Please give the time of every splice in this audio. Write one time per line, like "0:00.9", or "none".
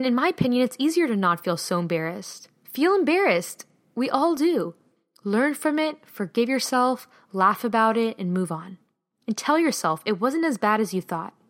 none

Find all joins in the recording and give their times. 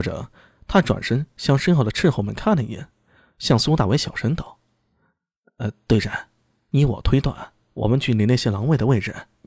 none

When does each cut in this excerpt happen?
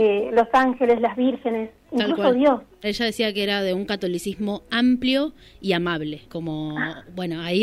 0:02.8
0:06.3

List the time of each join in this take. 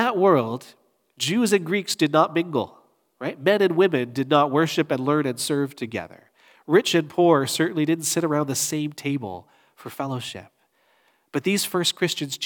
none

